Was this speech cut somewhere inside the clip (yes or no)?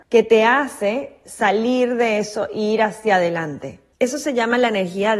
no